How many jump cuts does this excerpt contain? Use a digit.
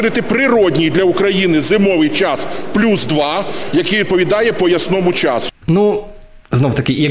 1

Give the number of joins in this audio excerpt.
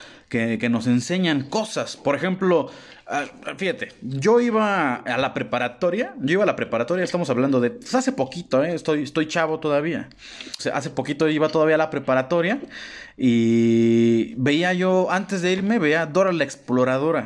1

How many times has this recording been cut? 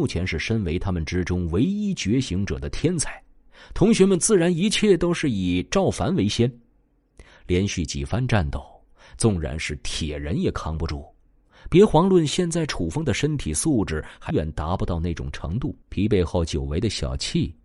2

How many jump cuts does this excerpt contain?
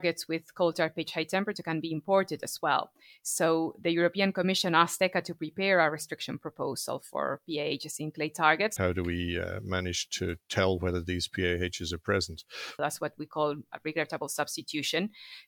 2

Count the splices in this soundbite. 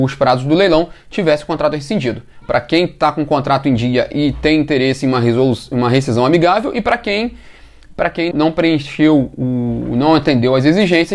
2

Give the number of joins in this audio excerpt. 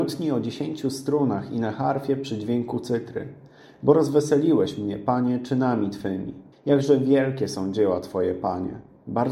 1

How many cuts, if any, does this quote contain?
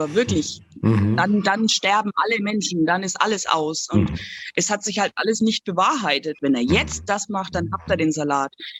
1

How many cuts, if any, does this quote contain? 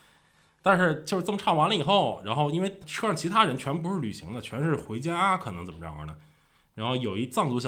0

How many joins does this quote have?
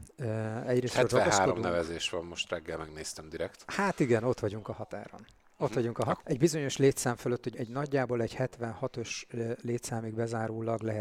2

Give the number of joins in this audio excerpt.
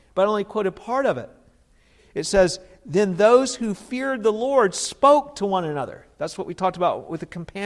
1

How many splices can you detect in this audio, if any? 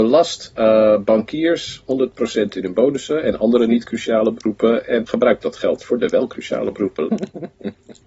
2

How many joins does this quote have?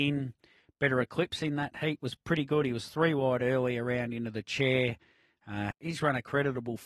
1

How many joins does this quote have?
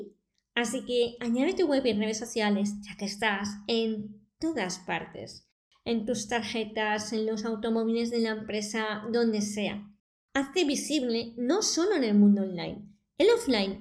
0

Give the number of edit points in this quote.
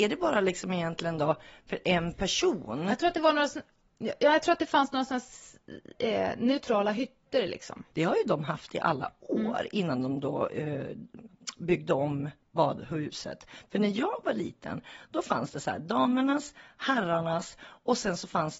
1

